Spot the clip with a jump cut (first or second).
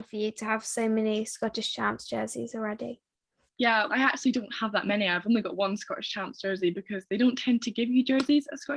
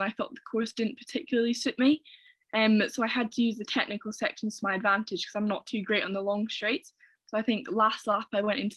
first